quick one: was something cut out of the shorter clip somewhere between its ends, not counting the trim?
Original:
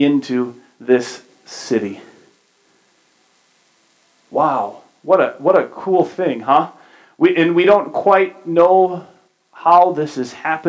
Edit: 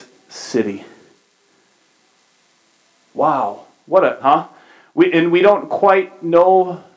yes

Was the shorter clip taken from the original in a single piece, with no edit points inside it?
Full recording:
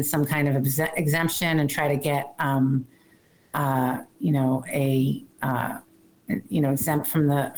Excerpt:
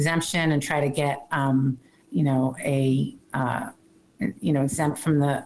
no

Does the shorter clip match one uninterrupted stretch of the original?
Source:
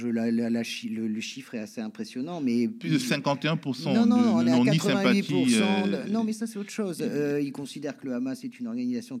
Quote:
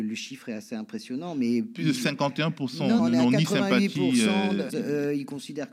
no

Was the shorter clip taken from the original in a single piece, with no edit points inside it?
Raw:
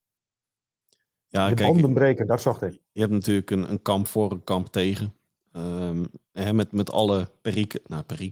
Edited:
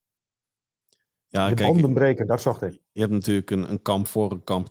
yes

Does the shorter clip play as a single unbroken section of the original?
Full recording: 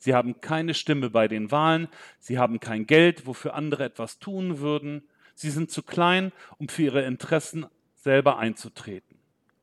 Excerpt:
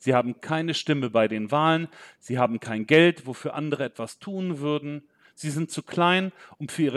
yes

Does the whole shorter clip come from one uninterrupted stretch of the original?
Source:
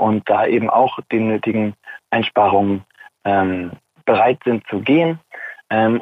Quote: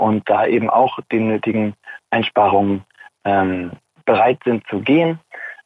yes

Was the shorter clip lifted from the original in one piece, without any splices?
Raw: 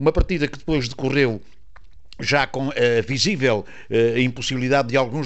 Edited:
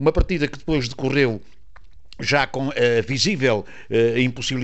yes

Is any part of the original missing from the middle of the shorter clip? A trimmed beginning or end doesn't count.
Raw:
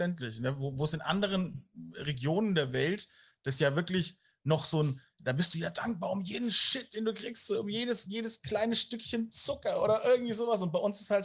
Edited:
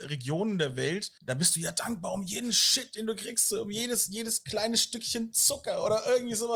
yes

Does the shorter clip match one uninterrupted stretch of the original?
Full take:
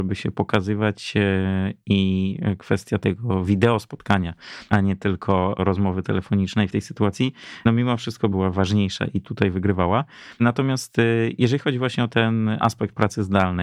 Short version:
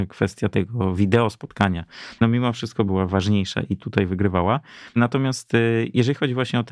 no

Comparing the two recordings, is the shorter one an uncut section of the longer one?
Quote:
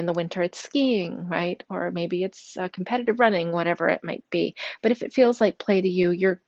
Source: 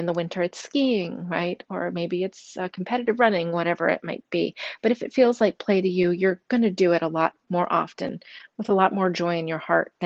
yes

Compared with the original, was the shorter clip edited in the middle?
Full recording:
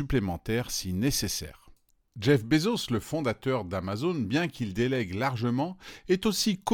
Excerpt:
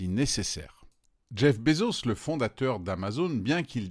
no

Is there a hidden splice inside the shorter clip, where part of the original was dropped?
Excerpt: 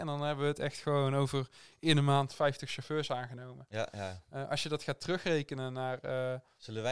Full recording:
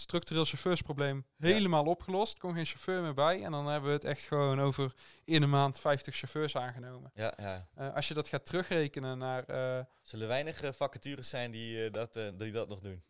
no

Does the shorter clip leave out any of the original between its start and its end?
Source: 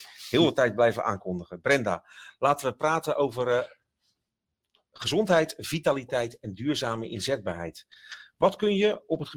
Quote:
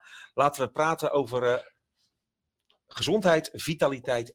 no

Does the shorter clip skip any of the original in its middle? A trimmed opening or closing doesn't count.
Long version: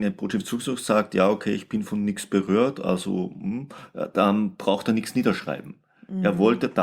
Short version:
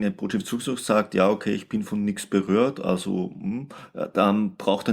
no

